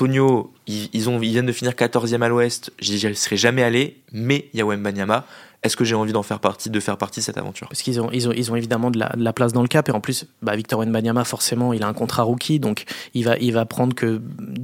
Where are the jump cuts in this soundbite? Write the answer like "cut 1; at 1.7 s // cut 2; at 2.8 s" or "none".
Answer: none